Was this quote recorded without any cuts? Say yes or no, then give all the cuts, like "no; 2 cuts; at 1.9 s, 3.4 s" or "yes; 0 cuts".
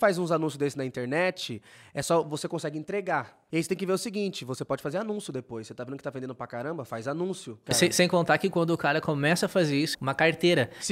no; 2 cuts; at 7.7 s, 9.9 s